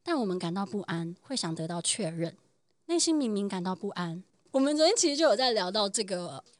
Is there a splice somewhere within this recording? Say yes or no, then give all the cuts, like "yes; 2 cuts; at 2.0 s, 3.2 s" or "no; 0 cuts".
yes; 1 cut; at 4.3 s